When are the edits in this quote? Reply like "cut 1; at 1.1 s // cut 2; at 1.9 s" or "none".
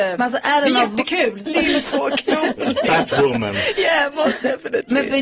cut 1; at 1.5 s